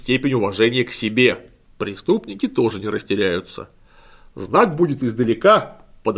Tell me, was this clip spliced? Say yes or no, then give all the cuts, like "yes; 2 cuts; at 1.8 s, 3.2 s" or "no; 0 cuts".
yes; 1 cut; at 1.6 s